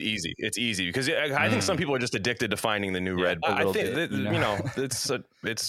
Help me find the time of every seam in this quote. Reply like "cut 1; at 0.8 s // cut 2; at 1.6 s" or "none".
cut 1; at 3.4 s